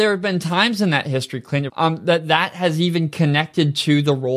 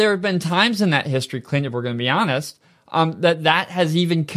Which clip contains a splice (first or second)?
first